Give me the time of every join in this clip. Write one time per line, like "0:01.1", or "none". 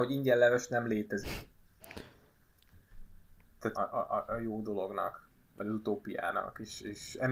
0:03.7